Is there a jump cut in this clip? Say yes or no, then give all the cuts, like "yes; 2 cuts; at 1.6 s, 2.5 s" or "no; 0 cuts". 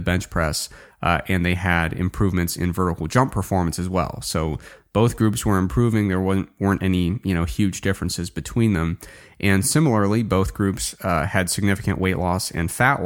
no; 0 cuts